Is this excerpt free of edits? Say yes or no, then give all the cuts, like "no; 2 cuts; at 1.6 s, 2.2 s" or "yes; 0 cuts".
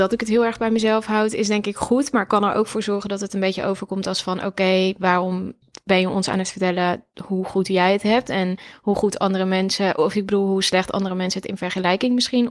yes; 0 cuts